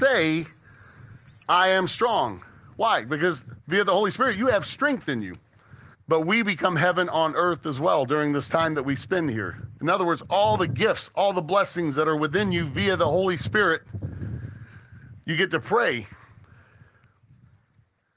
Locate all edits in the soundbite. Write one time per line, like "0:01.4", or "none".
0:05.9
0:09.8

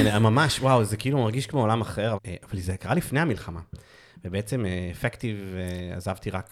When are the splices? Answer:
0:02.1

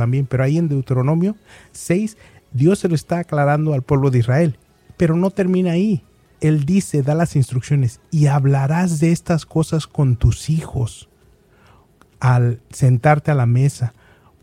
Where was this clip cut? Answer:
0:06.3

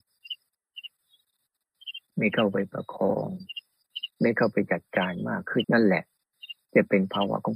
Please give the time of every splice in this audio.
0:02.1
0:05.6

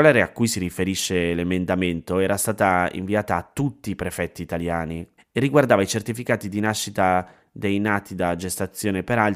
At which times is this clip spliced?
0:05.2

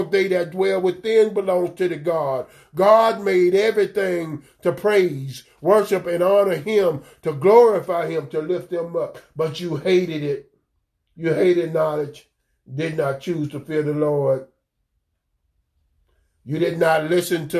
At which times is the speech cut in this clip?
none

